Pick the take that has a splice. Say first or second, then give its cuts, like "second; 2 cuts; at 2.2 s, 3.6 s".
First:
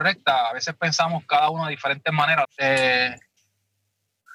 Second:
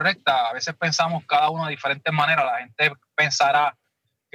first; 1 cut; at 2.4 s